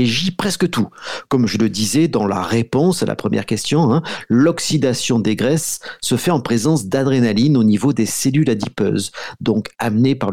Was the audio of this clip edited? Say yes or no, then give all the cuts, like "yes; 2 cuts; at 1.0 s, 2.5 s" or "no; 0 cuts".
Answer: no; 0 cuts